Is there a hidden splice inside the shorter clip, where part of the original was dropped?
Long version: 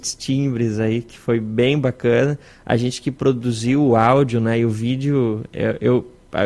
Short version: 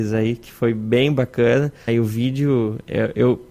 yes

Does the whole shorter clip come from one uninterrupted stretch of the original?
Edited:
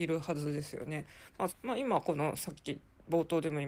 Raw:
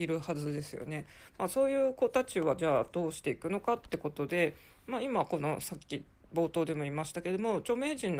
no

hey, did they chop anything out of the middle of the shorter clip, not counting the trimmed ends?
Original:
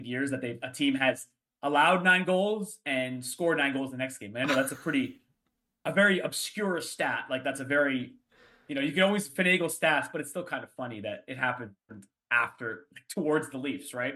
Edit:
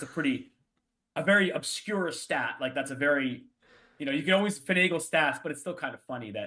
no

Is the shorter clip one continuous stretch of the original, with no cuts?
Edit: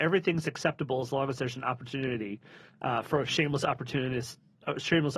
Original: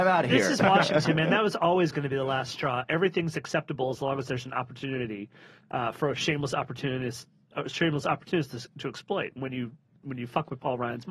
yes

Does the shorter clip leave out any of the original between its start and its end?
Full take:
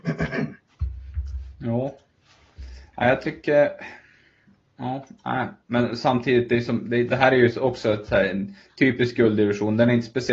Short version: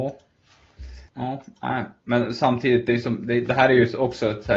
yes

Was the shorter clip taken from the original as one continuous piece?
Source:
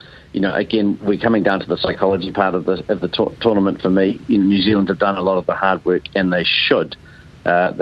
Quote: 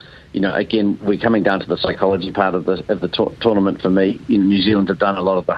yes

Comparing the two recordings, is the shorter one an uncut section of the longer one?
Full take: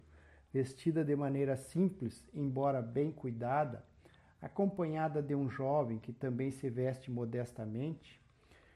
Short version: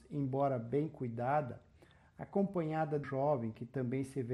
no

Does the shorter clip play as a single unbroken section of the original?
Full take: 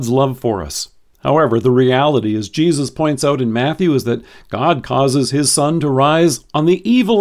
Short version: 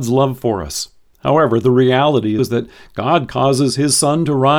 no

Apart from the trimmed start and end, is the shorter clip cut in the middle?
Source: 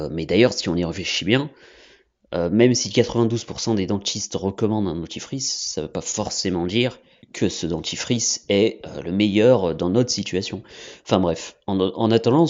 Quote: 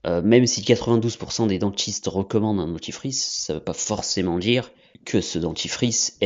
no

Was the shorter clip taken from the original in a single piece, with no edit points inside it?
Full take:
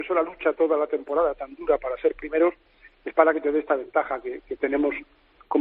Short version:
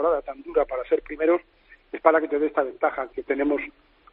no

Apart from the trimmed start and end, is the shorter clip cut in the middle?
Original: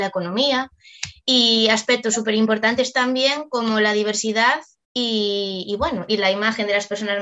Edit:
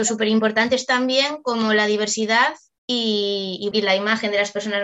yes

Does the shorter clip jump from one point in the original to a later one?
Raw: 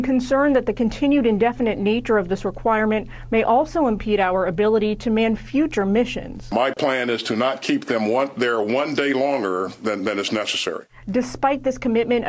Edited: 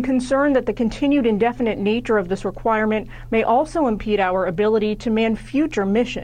no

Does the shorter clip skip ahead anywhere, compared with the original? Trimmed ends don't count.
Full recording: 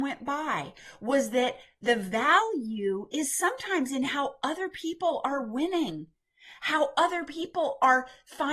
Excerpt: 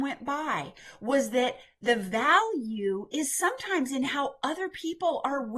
no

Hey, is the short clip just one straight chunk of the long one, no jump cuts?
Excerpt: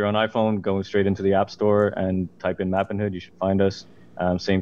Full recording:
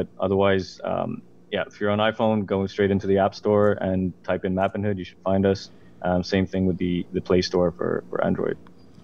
yes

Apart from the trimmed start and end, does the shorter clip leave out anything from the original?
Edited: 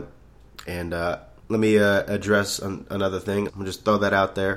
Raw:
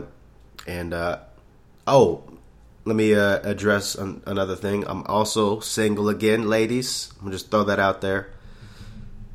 yes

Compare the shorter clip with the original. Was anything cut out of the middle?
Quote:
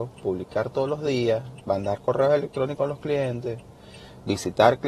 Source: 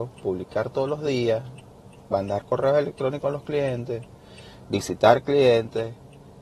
yes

